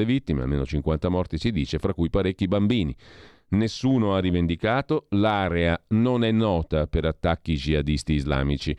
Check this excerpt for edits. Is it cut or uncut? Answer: uncut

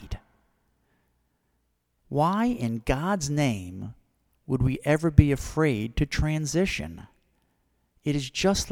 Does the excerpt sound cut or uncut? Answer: cut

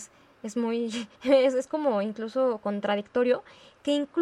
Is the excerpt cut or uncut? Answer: cut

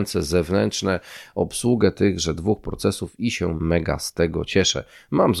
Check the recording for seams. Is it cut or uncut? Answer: cut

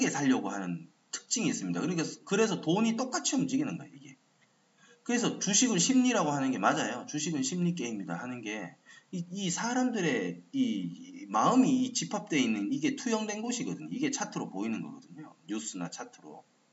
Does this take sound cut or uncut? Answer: uncut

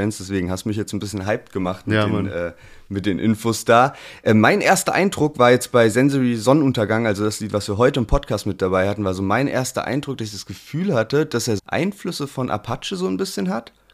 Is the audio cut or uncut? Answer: cut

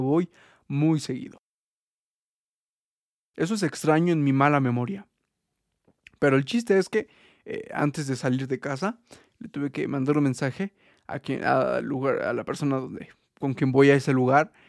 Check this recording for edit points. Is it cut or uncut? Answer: uncut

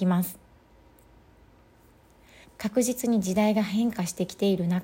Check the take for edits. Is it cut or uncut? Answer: cut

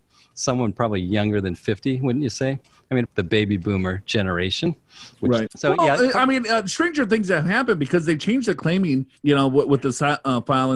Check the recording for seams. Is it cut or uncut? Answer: cut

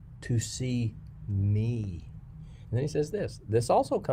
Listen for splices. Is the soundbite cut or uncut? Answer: cut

